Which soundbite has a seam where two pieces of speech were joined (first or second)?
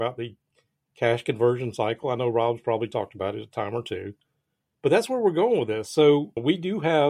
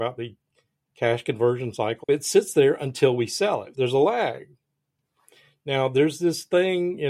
second